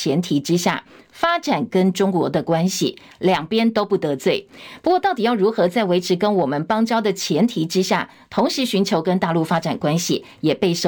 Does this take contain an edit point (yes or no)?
no